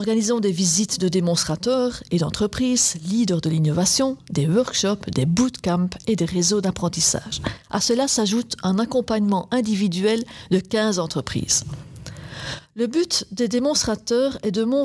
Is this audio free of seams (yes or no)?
yes